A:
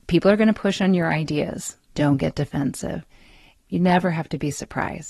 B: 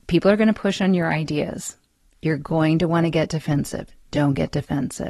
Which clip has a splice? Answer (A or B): A